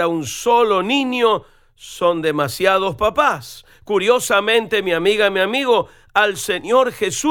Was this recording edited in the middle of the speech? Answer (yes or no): no